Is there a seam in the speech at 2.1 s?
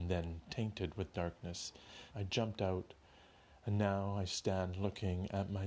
yes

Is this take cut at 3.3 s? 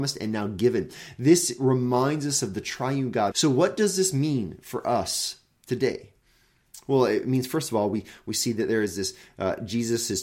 yes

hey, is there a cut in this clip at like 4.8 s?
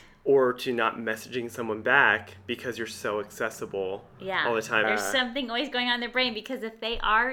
yes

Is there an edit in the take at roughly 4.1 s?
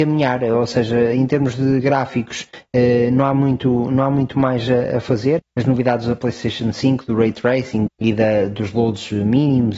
no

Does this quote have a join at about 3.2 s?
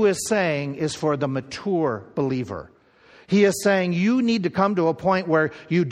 no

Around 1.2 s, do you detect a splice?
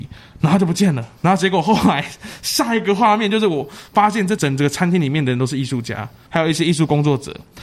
yes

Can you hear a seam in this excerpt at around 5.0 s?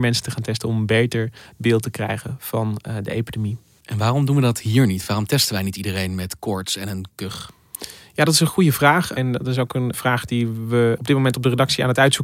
no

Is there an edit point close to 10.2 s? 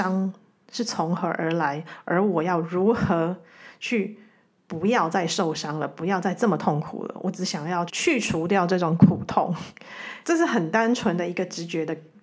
yes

